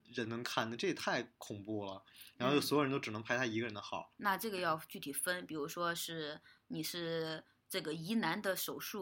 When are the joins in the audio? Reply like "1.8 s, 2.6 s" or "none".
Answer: 4.2 s